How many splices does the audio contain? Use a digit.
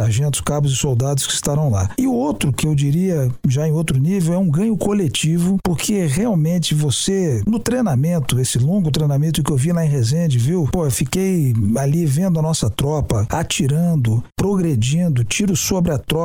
1